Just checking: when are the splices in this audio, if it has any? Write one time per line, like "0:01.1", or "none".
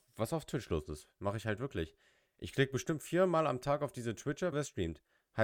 0:04.5